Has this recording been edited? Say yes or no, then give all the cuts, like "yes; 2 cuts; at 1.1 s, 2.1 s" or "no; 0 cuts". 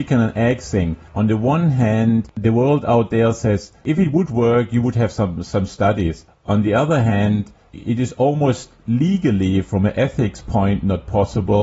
no; 0 cuts